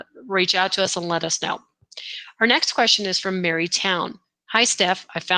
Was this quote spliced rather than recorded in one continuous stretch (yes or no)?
no